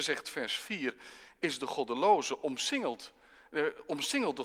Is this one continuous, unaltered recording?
yes; 0 cuts

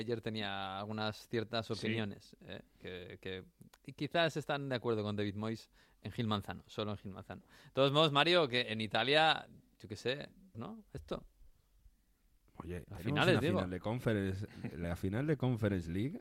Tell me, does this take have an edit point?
yes; 2 cuts; at 10.5 s, 12.9 s

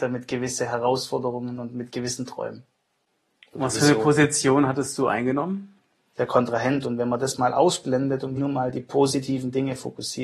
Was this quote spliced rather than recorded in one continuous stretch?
yes; 2 cuts; at 6.1 s, 8.4 s

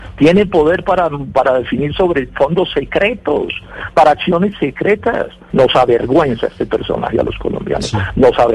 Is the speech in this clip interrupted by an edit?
yes; 1 cut; at 5.5 s

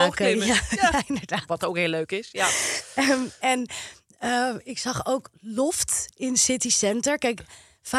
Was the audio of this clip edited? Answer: no; 0 cuts

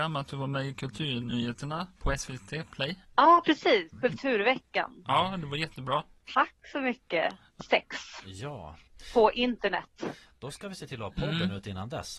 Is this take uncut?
no; 1 cut; at 7.6 s

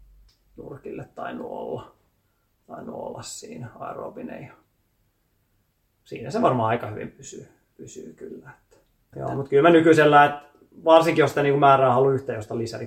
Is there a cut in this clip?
yes; 1 cut; at 9.1 s

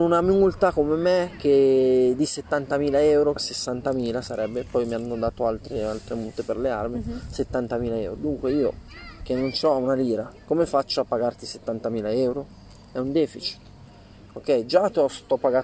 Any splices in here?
yes; 1 cut; at 3.4 s

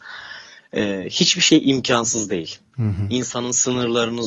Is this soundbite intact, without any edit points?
no; 1 cut; at 2.7 s

